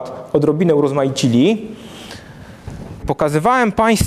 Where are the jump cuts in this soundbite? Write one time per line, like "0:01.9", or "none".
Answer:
0:03.0